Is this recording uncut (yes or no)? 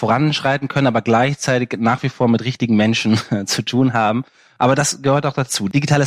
yes